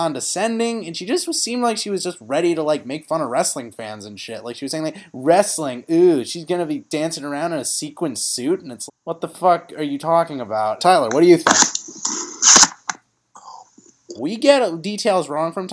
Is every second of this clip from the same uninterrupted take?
no; 3 cuts; at 8.9 s, 10.8 s, 14.2 s

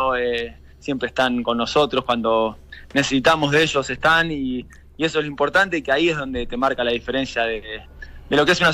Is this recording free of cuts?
yes; 0 cuts

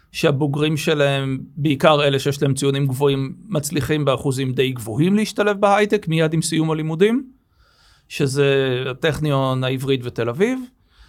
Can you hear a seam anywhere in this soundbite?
no; 0 cuts

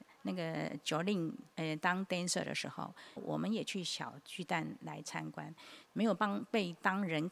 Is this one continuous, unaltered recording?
no; 3 cuts; at 1.5 s, 3.2 s, 5.9 s

